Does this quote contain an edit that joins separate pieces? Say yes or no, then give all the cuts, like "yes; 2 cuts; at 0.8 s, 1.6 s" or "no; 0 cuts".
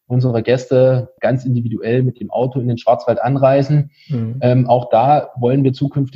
no; 0 cuts